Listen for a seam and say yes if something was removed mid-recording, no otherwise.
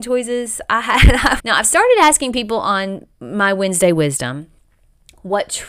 yes